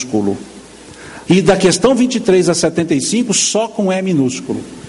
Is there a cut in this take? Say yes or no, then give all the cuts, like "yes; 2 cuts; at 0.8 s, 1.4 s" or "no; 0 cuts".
yes; 1 cut; at 1.3 s